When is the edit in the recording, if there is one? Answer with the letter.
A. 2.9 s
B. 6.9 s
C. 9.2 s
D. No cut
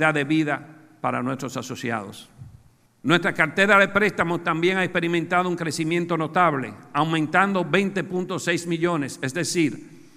A